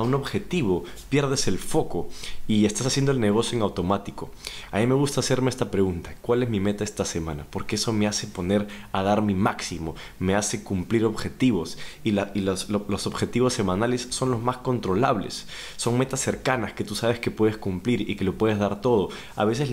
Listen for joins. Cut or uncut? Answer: uncut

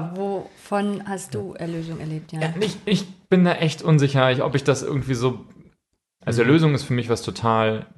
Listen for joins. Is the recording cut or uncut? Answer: cut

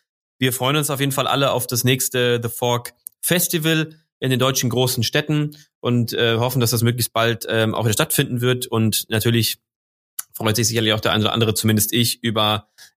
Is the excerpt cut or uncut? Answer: uncut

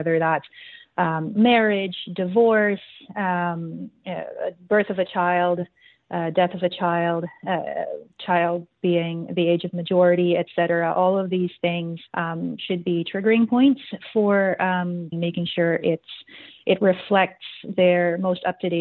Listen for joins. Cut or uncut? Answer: cut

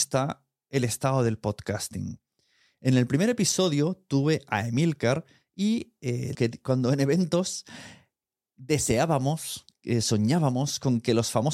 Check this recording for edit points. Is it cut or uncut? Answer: cut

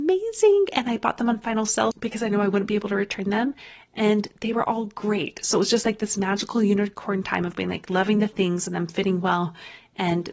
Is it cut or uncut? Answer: cut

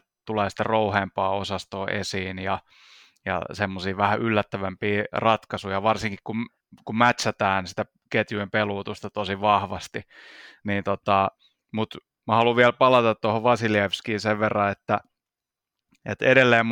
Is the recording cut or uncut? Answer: uncut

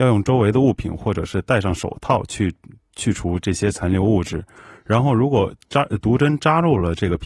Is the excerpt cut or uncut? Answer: uncut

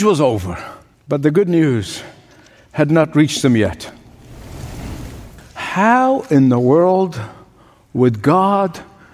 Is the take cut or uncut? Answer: cut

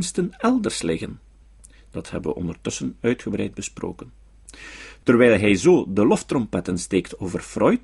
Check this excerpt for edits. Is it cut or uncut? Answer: uncut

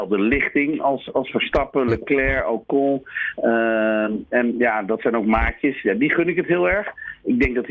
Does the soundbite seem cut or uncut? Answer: uncut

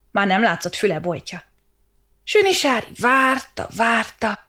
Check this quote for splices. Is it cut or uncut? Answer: uncut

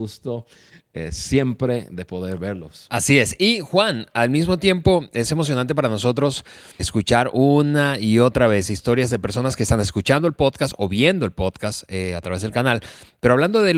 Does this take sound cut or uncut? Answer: cut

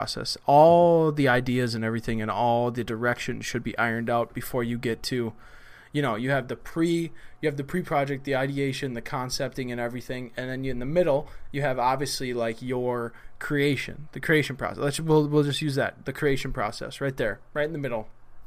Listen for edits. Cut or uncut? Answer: uncut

